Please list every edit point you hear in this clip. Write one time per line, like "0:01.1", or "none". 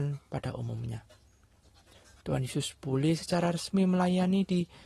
0:02.2

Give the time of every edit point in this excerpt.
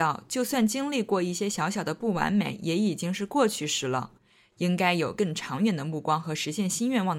none

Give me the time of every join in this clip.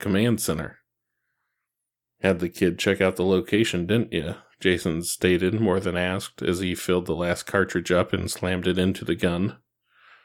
none

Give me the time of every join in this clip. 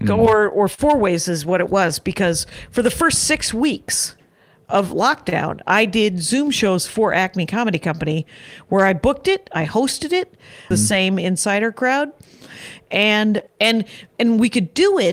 0:10.7
0:13.5

